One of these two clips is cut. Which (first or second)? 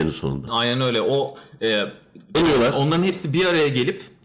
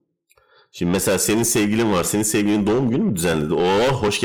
first